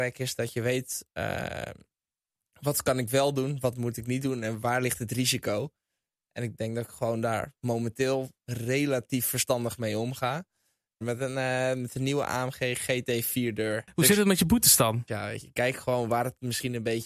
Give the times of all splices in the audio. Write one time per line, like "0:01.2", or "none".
0:11.0
0:15.1